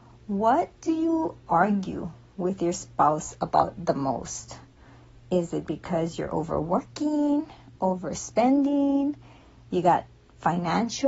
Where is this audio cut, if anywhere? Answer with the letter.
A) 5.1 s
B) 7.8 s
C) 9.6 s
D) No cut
B